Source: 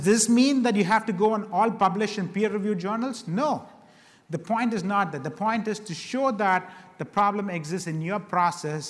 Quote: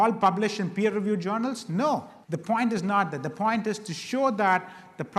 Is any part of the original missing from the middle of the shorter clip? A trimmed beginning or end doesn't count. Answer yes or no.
yes